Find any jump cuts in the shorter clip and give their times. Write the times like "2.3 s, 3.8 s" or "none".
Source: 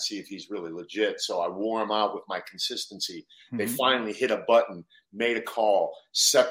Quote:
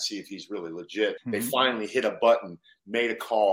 1.2 s